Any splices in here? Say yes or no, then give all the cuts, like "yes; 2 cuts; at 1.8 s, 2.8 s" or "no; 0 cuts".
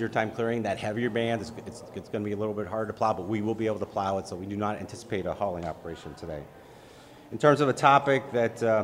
no; 0 cuts